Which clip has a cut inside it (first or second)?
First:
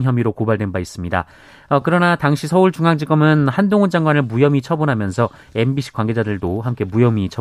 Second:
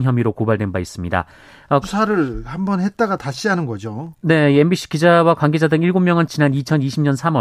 second